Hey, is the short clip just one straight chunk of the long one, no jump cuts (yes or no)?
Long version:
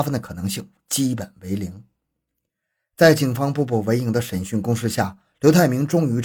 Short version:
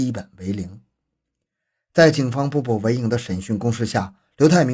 yes